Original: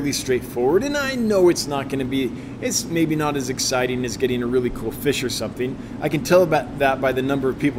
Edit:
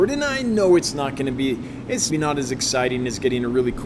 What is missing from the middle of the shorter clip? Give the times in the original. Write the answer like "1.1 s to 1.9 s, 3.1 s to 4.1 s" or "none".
2.8 s to 3.1 s